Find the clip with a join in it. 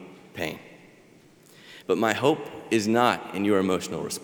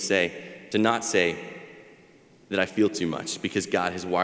first; 1 cut; at 1.8 s

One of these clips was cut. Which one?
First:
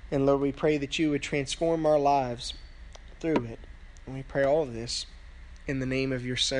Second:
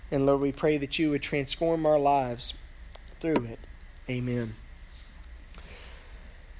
second; 1 cut; at 4.0 s

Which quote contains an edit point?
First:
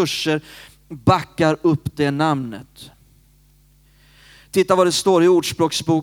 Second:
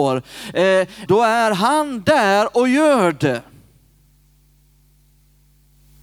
second; 1 cut; at 1.1 s

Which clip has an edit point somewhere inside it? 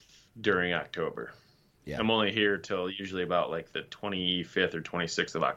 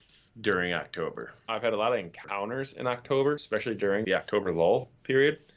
second; 2 cuts; at 1.5 s, 4.0 s

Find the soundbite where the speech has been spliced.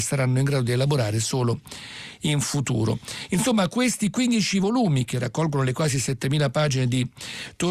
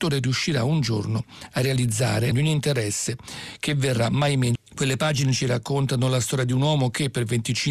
second; 2 cuts; at 2.3 s, 4.6 s

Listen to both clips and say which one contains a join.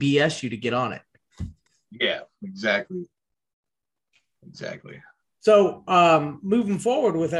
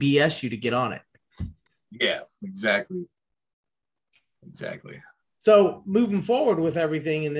second; 1 cut; at 5.8 s

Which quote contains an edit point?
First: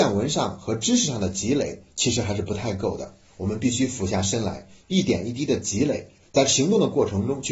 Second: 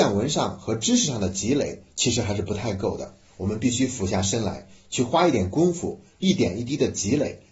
first; 2 cuts; at 4.8 s, 6.2 s

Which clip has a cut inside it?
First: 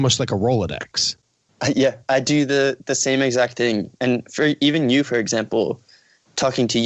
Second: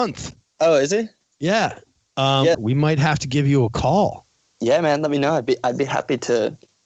second; 1 cut; at 2.5 s

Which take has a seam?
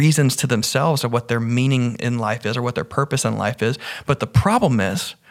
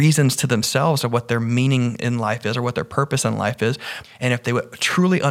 second; 1 cut; at 4.0 s

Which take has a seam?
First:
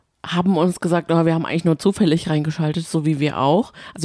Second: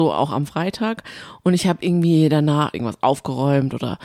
second; 1 cut; at 2.7 s

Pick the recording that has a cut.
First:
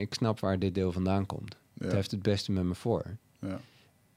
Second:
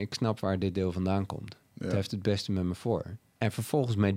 second; 1 cut; at 3.3 s

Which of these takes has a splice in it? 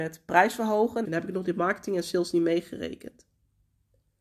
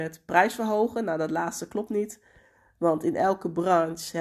first; 1 cut; at 1.0 s

